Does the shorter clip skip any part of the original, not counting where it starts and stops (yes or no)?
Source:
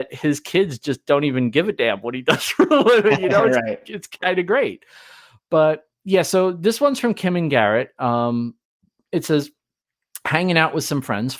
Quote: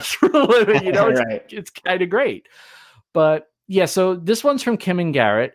no